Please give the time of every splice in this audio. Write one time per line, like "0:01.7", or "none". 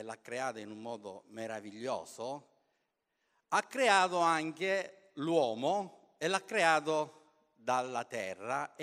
none